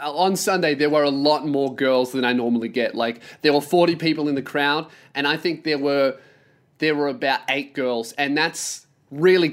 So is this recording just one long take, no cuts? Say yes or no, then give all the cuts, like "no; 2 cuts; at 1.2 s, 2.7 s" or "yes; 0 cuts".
yes; 0 cuts